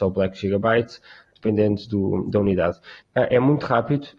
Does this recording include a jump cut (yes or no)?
yes